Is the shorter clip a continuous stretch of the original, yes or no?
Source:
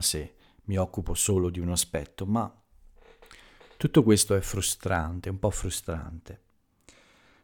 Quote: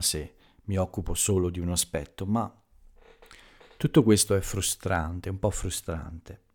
yes